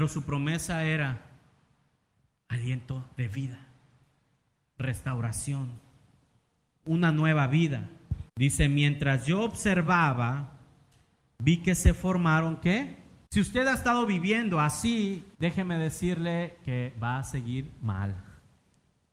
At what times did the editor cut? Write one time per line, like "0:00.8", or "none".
0:08.3
0:13.3
0:15.3